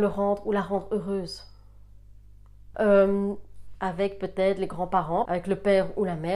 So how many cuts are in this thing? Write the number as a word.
three